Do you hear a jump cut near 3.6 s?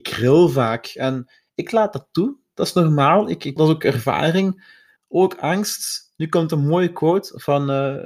yes; 2 cuts; at 3.6 s, 5.0 s

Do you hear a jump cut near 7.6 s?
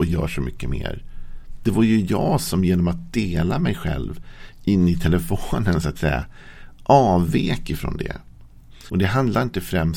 no; 2 cuts; at 1.6 s, 8.9 s

